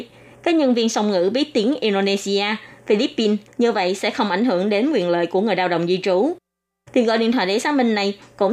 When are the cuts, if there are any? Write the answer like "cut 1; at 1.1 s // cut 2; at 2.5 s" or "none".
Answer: cut 1; at 3.5 s